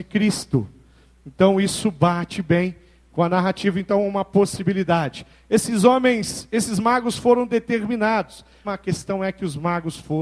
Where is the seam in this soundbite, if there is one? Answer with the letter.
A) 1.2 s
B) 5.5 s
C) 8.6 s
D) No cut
C